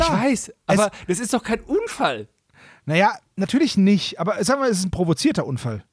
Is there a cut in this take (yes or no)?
no